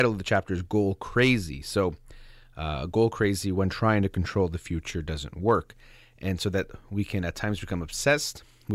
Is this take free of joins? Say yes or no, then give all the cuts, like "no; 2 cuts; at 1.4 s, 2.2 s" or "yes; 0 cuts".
yes; 0 cuts